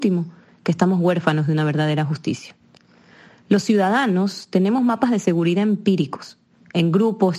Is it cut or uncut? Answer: uncut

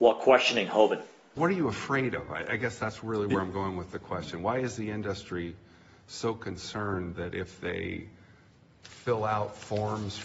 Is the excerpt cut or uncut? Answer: uncut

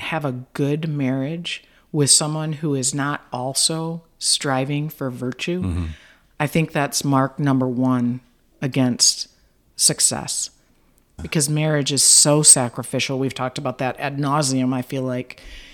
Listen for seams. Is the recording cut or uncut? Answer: cut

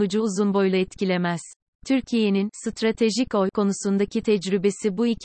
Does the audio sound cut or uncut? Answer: cut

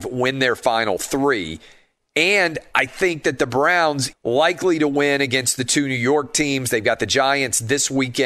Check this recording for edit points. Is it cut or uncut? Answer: cut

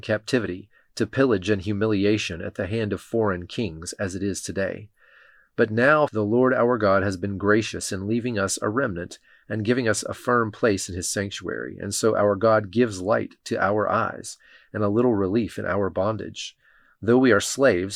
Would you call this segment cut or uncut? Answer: cut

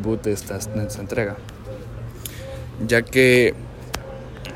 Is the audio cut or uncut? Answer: uncut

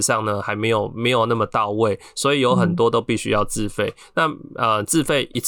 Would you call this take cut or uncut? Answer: uncut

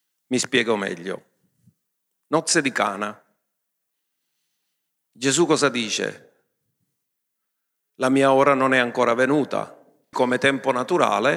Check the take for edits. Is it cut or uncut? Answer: cut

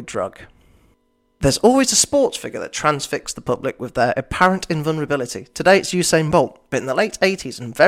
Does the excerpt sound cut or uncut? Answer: uncut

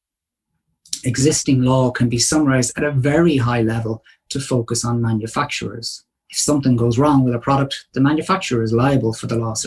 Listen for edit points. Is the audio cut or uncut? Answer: uncut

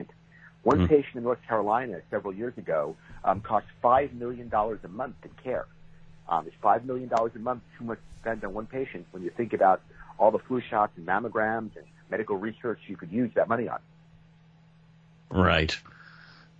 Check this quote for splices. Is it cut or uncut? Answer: uncut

